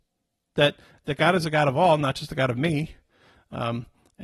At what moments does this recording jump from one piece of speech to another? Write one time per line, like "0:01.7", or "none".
none